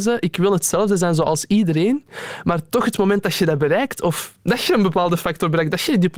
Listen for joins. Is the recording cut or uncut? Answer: cut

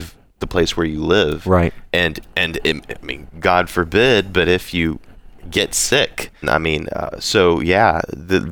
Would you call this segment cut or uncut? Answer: cut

